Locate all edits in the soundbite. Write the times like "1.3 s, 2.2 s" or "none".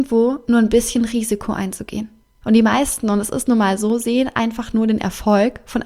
2.4 s